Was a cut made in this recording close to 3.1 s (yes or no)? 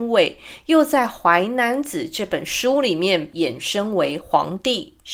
no